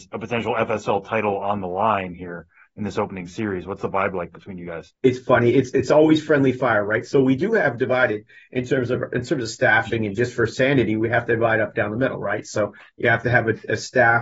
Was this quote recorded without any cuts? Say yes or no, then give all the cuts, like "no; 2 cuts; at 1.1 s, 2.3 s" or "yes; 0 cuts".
no; 1 cut; at 4.9 s